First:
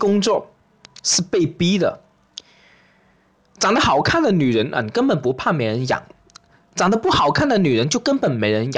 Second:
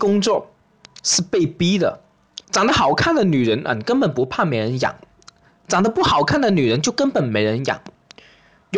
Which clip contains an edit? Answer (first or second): second